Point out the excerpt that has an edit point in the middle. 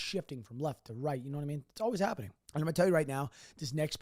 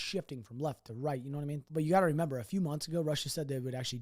second; 1 cut; at 1.7 s

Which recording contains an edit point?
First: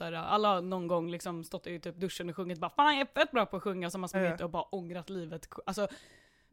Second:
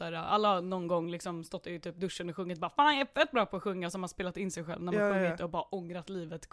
first; 1 cut; at 4.1 s

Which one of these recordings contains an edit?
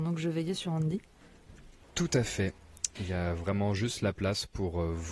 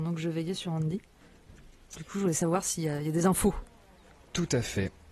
first; 2 cuts; at 1.8 s, 3.0 s

